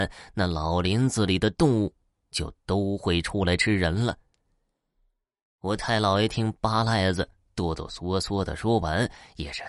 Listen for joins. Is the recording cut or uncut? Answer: uncut